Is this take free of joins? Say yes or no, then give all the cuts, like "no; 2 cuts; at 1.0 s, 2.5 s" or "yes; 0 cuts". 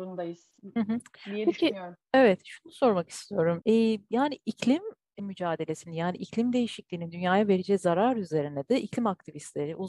no; 2 cuts; at 3.6 s, 5.2 s